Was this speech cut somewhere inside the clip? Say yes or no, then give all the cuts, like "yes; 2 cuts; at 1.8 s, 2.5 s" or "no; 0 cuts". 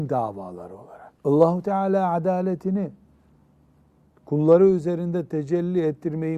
yes; 1 cut; at 1.2 s